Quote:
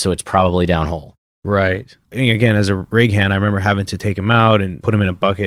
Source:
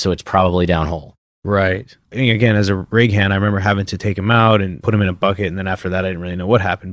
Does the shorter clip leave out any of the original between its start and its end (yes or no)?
no